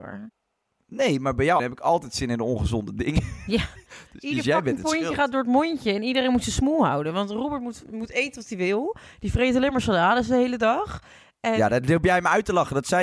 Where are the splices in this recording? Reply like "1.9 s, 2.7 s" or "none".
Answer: 1.6 s